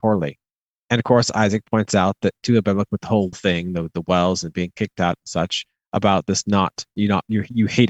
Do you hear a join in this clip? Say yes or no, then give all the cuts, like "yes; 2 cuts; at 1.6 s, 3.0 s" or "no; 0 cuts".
yes; 1 cut; at 3.3 s